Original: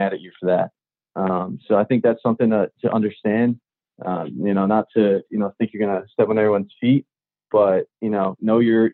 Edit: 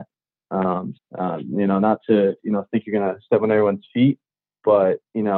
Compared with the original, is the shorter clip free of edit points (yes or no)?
no